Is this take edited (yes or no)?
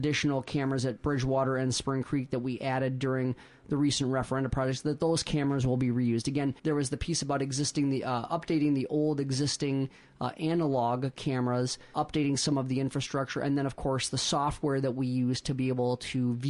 yes